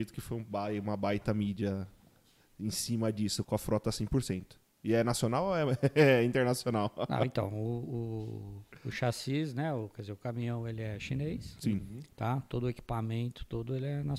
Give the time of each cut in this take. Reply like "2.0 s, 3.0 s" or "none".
3.4 s